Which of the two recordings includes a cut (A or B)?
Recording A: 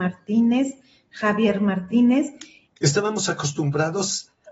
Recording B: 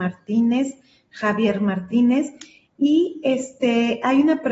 A